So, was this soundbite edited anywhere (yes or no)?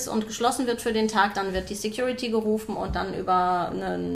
no